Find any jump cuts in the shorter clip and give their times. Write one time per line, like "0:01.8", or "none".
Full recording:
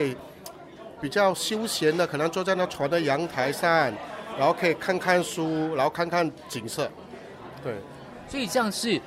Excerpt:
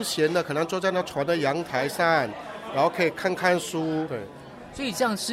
0:04.1